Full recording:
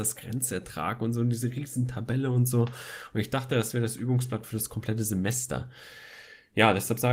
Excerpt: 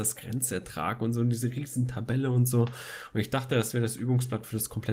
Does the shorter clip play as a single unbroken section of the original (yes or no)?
yes